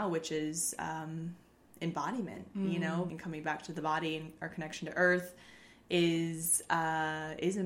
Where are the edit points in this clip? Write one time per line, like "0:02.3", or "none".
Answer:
0:03.1